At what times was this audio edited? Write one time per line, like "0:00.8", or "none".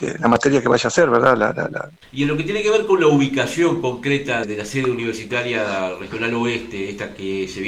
0:02.0
0:04.4